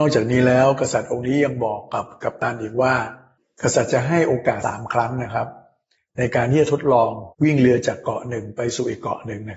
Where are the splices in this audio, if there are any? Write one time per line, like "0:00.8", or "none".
0:04.6
0:07.3

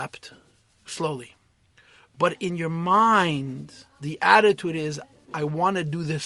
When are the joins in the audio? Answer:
none

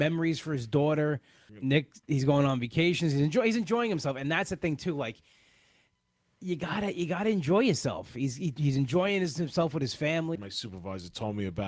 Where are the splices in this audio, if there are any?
0:01.5
0:08.6
0:10.3

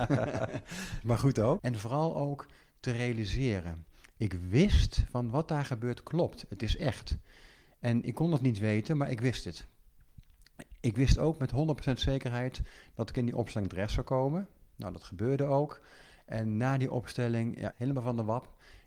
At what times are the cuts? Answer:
0:01.6
0:17.7

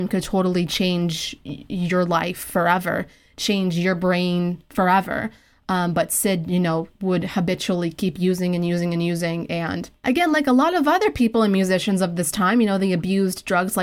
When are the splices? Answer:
none

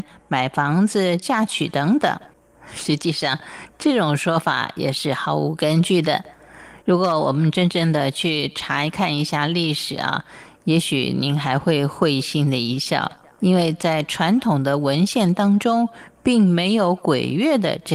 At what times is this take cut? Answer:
0:02.5
0:06.8

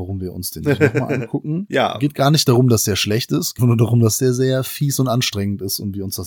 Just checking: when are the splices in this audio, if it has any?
0:03.6

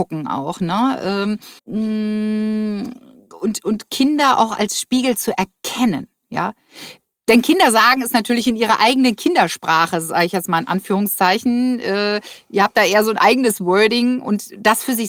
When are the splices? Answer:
0:01.6

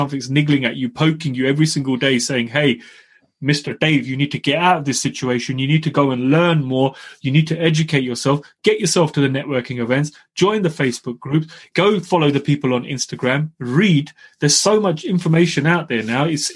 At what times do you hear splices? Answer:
none

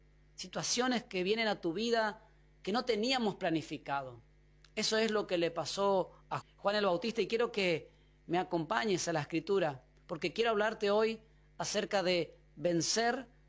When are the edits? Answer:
0:06.4

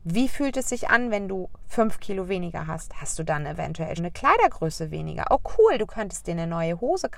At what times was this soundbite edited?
0:04.0

